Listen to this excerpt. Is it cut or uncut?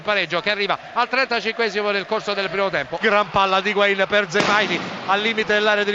cut